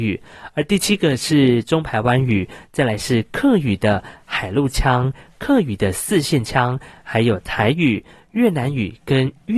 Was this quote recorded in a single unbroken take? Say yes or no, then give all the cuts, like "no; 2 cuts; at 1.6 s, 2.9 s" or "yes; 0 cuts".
yes; 0 cuts